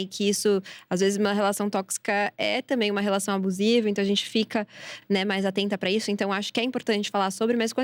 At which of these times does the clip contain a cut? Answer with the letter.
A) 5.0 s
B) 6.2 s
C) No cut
C